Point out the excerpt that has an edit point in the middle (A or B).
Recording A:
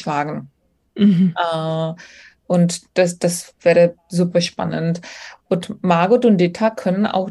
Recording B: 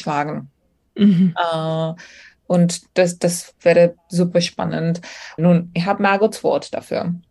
B